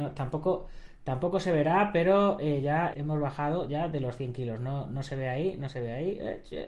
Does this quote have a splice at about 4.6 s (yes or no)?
no